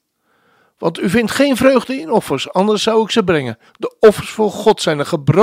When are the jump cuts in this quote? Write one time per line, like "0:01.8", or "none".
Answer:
0:03.7